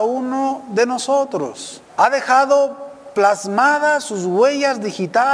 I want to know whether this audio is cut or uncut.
cut